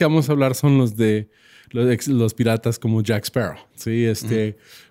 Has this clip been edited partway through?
yes; 1 cut; at 3.7 s

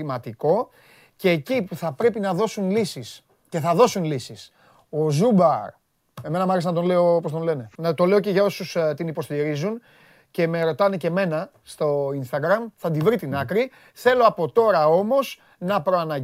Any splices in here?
yes; 2 cuts; at 4.9 s, 7.8 s

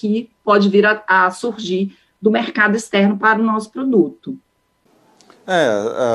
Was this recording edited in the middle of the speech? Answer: no; 0 cuts

